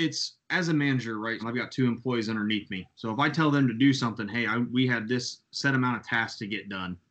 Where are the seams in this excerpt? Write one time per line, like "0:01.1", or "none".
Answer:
0:01.4